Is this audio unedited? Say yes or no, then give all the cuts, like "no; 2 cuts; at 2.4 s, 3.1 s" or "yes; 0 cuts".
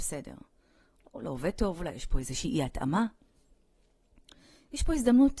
yes; 0 cuts